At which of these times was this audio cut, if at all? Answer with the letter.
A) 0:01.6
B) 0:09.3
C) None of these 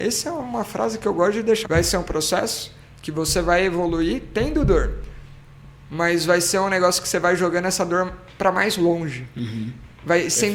A